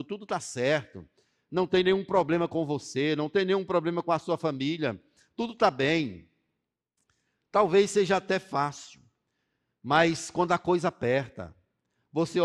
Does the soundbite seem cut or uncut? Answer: uncut